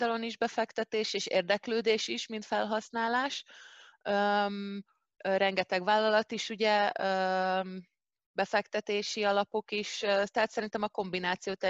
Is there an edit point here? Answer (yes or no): no